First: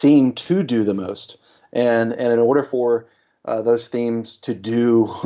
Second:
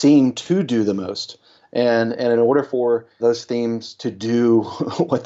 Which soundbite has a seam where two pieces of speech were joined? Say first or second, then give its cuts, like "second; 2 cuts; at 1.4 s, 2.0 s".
second; 1 cut; at 3.2 s